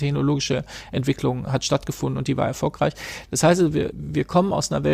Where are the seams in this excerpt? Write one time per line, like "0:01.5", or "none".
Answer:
0:03.9